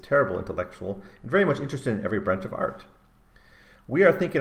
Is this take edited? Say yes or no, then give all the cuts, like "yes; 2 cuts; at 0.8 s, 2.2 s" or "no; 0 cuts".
no; 0 cuts